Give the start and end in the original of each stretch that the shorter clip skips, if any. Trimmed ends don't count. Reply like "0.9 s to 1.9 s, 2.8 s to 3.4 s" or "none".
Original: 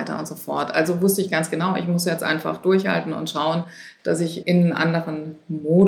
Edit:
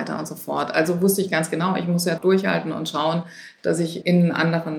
2.2 s to 2.6 s